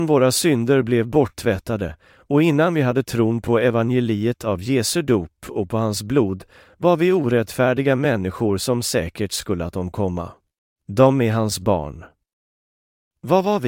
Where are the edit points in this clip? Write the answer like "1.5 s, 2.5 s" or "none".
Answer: 10.8 s